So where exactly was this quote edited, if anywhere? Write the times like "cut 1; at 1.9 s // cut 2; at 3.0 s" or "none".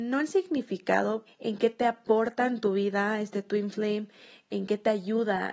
cut 1; at 1.3 s